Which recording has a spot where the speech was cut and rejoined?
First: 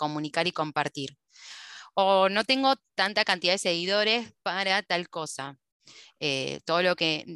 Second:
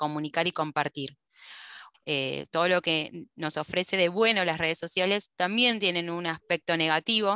second; 1 cut; at 1.9 s

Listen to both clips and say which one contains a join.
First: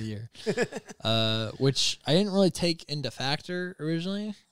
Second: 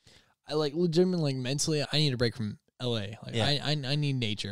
second; 1 cut; at 1.8 s

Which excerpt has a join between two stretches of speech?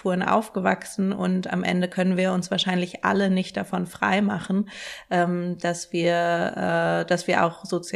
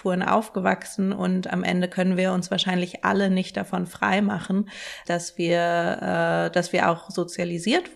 second; 1 cut; at 5.0 s

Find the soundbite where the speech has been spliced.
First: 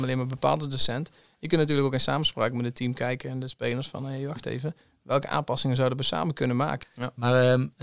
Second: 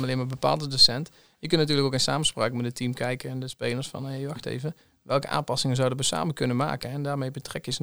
first; 1 cut; at 6.8 s

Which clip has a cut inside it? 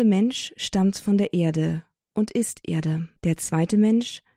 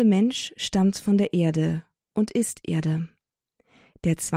first; 1 cut; at 3.2 s

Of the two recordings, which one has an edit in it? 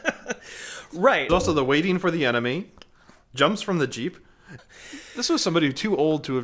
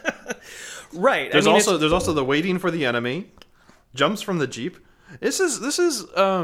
first; 2 cuts; at 1.3 s, 4.6 s

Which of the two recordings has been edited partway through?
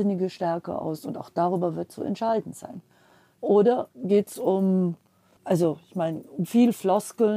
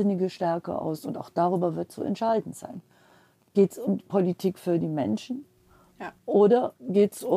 first; 2 cuts; at 3.4 s, 5.4 s

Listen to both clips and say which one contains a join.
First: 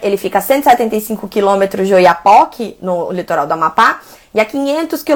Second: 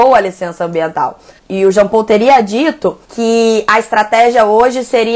second; 2 cuts; at 1.4 s, 3.0 s

